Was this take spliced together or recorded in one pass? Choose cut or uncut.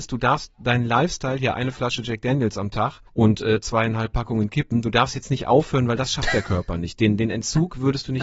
cut